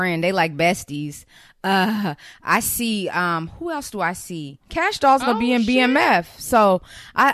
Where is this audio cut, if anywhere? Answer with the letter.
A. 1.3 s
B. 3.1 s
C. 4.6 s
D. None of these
C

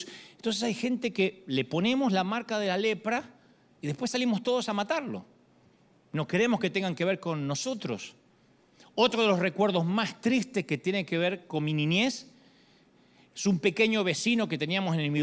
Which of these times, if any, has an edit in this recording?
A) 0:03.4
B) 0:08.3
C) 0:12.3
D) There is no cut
D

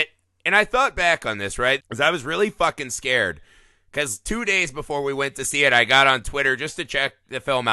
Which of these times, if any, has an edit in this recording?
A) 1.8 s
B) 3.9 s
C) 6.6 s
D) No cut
A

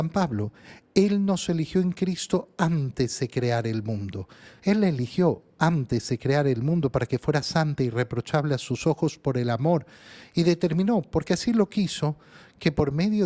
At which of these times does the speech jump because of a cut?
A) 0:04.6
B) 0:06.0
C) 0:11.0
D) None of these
A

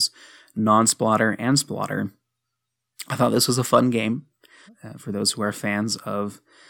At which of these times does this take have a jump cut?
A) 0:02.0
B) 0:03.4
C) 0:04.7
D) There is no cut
C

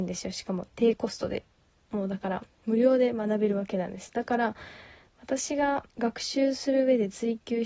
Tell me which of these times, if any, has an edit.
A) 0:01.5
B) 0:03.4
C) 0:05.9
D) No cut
C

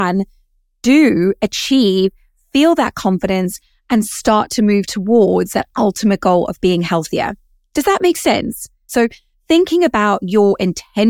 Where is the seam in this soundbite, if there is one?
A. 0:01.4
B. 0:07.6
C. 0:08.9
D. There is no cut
C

